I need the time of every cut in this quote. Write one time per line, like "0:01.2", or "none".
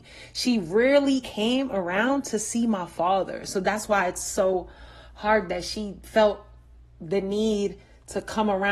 0:01.2